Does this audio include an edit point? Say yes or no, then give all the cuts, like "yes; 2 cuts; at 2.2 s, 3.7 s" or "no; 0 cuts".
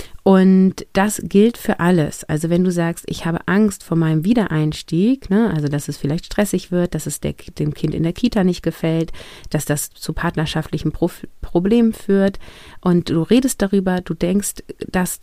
no; 0 cuts